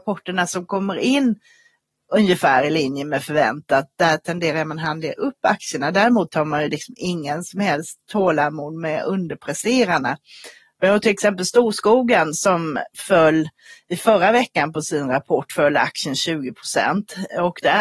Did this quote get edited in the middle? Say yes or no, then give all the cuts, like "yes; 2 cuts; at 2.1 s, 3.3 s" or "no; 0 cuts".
no; 0 cuts